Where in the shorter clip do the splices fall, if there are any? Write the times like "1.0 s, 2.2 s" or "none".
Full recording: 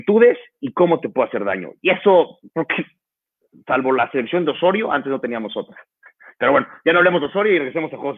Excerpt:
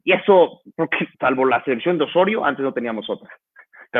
1.1 s